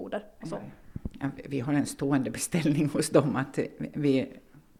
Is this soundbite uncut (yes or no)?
yes